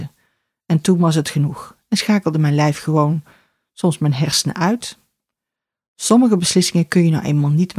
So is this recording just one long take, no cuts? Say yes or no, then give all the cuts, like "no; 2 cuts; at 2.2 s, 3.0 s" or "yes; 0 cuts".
yes; 0 cuts